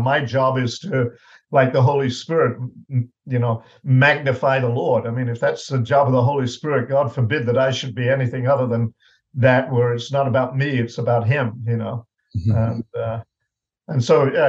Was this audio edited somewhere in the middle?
no; 0 cuts

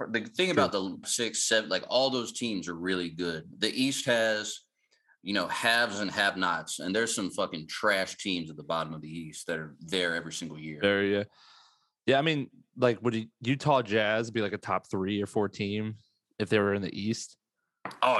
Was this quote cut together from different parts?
yes; 1 cut; at 1.0 s

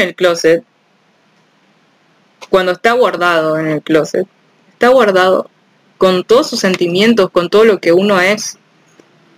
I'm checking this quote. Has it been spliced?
no; 0 cuts

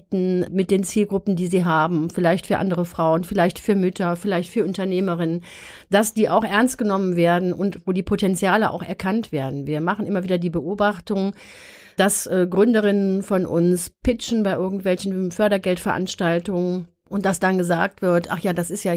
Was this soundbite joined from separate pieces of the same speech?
no; 0 cuts

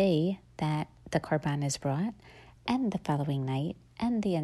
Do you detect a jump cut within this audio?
no; 0 cuts

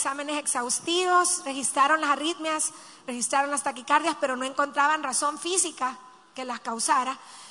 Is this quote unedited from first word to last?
yes; 0 cuts

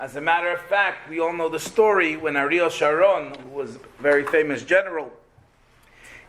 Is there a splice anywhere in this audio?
no; 0 cuts

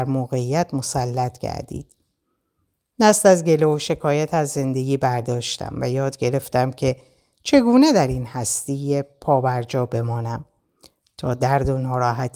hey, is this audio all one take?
yes; 0 cuts

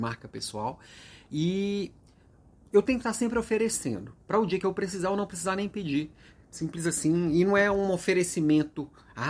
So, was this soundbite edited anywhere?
no; 0 cuts

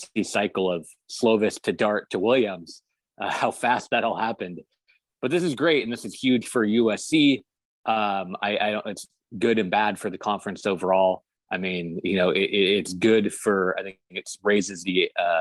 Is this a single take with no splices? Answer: yes; 0 cuts

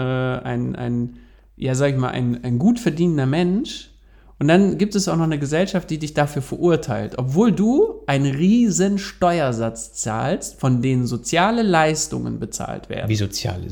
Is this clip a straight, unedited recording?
yes; 0 cuts

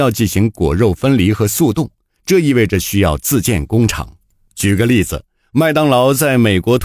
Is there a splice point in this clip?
yes; 1 cut; at 4.5 s

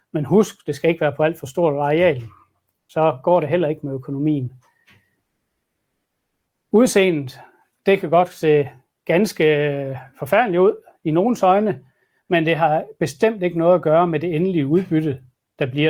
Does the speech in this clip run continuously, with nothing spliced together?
yes; 0 cuts

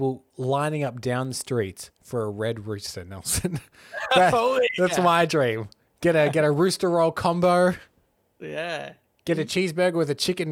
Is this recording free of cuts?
yes; 0 cuts

